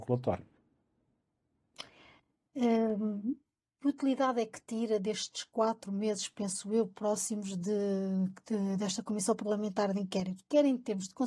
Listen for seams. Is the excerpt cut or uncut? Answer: uncut